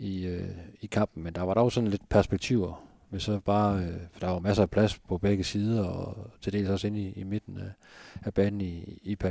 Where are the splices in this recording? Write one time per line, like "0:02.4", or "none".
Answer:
none